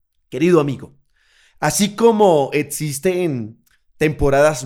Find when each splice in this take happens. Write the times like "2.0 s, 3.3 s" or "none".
none

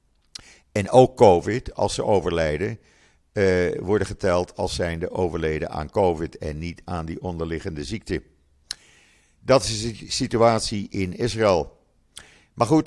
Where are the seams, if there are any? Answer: none

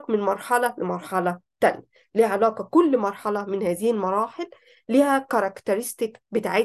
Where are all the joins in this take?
none

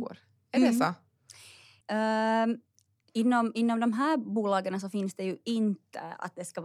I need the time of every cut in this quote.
1.8 s

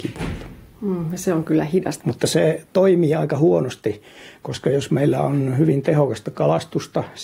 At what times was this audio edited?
2.0 s

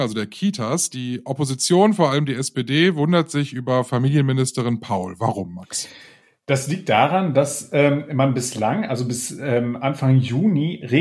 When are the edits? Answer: none

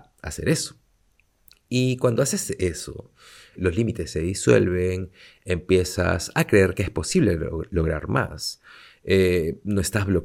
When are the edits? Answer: 3.6 s

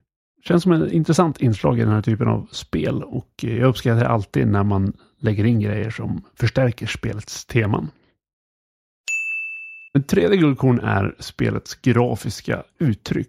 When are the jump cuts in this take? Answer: 9.9 s

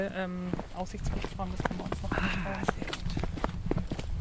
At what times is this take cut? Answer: none

